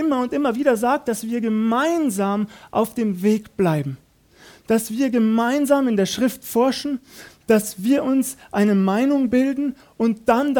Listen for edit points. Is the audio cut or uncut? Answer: uncut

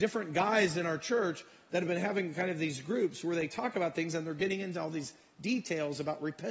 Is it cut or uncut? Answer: uncut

